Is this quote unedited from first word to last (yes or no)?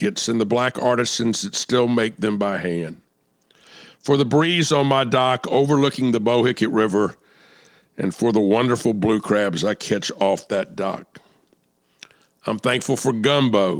yes